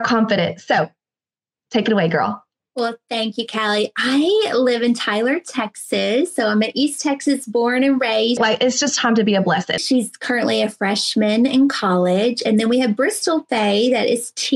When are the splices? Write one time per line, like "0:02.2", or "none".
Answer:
0:08.4
0:09.8